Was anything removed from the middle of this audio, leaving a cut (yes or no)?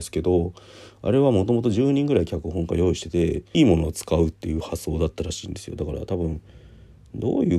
yes